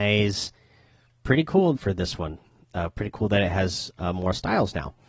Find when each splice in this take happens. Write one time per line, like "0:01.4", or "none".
0:01.8